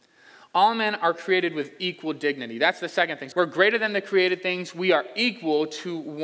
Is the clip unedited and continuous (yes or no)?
no